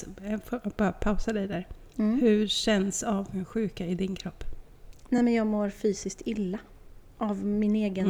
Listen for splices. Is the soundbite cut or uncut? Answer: uncut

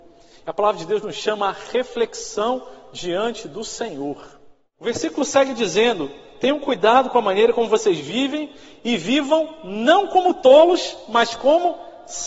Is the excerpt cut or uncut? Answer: uncut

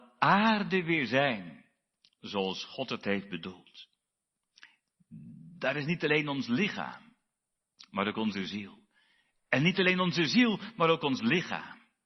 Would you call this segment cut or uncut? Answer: uncut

